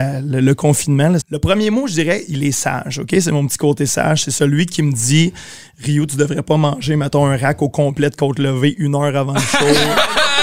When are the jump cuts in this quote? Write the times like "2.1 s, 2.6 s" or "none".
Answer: 1.2 s

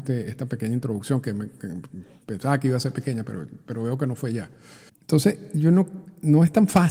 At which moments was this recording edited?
4.9 s

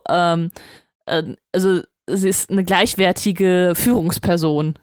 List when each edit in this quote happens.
none

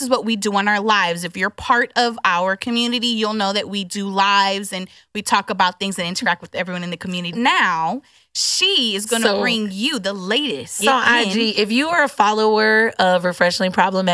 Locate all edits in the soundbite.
7.3 s, 10.8 s

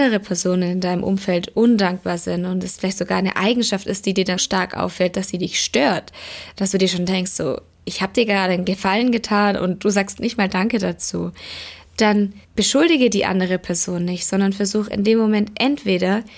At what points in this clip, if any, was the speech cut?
4.4 s, 12.4 s

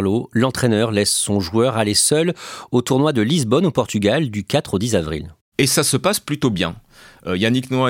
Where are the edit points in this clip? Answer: none

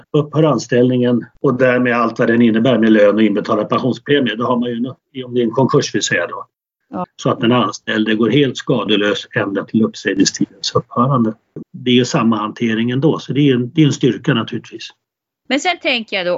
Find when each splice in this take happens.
7.0 s, 11.6 s

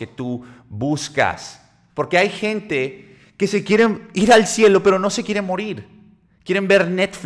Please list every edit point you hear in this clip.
1.9 s

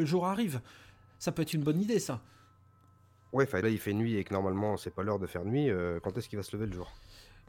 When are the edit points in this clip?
3.6 s

